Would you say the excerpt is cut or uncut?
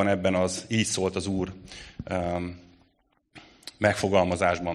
uncut